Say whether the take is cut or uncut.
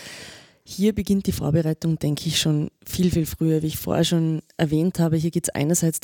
uncut